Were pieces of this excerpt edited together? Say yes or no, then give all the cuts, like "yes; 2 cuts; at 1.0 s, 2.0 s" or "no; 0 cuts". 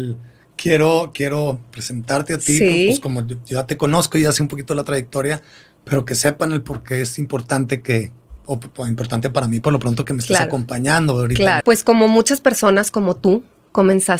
yes; 1 cut; at 11.6 s